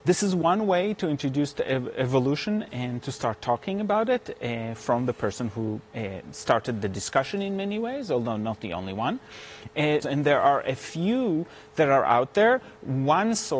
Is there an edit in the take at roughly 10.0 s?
yes; 1 cut; at 10.0 s

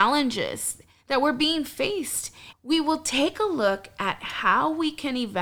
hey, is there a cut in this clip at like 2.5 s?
yes; 1 cut; at 2.5 s

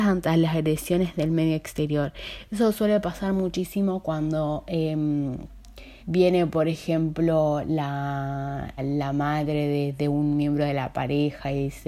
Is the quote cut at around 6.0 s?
yes; 2 cuts; at 6.0 s, 8.8 s

